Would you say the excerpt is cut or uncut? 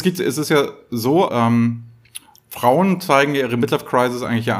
cut